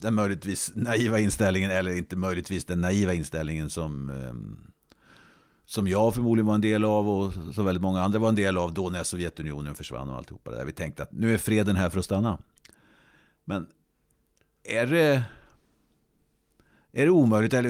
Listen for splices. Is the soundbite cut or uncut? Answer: cut